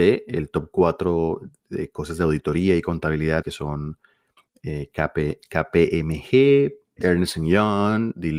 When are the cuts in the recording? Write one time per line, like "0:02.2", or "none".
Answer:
0:03.4
0:07.0